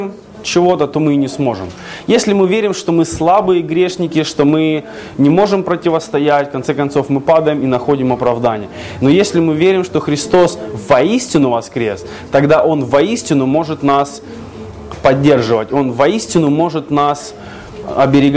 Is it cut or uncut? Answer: uncut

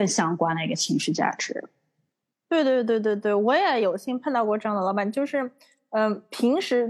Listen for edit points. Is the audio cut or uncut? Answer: uncut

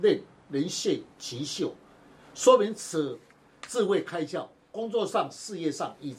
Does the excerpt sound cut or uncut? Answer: uncut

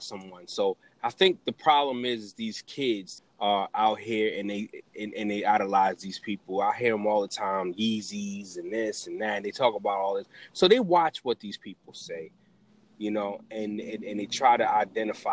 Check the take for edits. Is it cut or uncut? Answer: cut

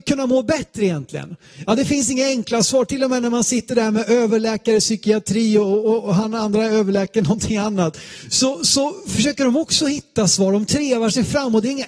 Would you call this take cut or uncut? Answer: uncut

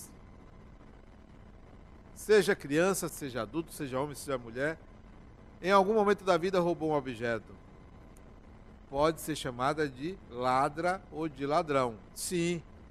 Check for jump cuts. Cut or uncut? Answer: cut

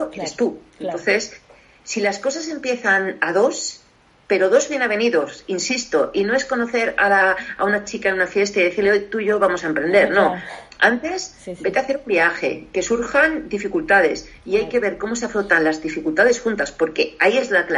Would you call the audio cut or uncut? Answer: uncut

